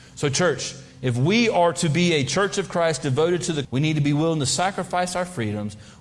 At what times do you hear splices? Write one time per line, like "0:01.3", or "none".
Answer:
0:03.6